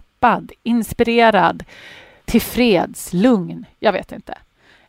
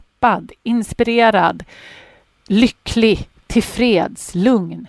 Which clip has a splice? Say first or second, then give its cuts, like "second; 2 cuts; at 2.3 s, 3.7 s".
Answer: first; 1 cut; at 2.2 s